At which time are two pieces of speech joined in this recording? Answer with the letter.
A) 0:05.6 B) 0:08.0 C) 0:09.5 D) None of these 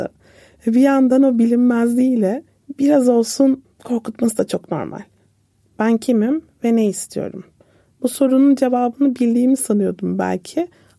A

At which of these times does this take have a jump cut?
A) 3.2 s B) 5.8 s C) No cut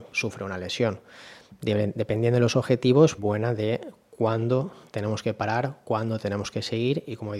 A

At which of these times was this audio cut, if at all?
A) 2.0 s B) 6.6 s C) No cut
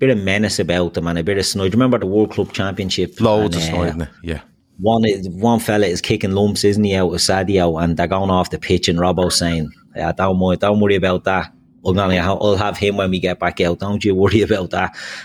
A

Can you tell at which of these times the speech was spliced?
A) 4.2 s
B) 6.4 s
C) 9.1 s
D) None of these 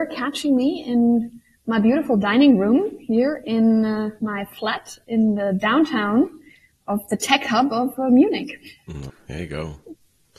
C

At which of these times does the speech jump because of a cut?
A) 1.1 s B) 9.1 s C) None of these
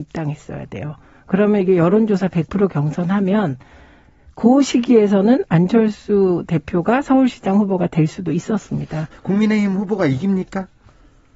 B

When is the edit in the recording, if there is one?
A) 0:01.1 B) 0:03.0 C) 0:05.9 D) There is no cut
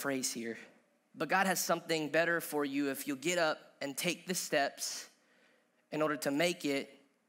A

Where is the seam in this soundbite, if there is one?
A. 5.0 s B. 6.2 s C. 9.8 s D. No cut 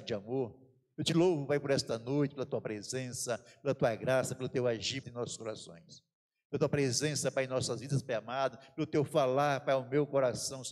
A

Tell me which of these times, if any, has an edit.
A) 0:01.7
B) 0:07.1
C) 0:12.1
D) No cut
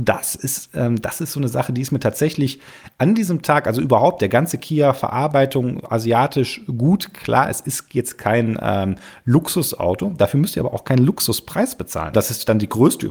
C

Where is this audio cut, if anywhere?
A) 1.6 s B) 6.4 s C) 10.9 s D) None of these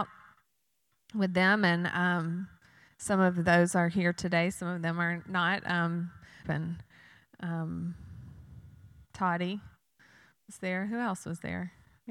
B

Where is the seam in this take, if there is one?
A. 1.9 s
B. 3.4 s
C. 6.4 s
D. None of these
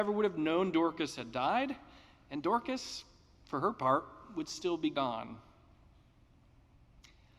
D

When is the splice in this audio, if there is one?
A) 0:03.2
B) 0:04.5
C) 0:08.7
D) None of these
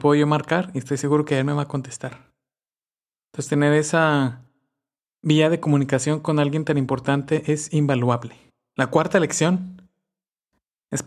D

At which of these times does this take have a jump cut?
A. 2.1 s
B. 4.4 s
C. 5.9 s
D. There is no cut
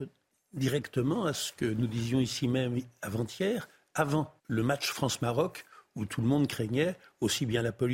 B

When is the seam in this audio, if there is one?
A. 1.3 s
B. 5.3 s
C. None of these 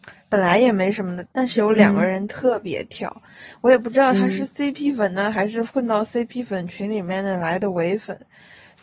A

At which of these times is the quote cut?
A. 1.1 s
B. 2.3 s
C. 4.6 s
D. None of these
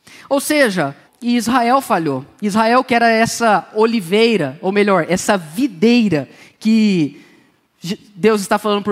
A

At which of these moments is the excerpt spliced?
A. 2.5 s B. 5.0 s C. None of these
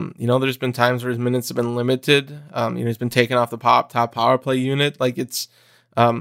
C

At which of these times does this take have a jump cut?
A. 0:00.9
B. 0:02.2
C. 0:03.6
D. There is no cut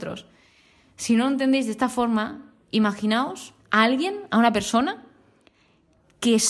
C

